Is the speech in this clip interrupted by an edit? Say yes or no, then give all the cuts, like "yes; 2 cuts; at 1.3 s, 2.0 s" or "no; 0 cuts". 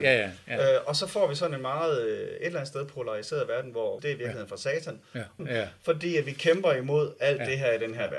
yes; 2 cuts; at 4.0 s, 5.4 s